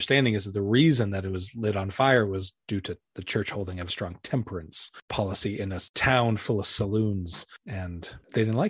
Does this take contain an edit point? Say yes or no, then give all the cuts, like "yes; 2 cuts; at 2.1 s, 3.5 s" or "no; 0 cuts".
yes; 1 cut; at 3.9 s